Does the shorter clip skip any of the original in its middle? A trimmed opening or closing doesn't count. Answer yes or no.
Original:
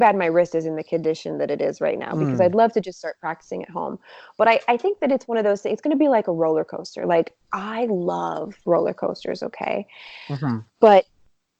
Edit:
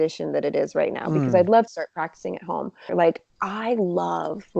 yes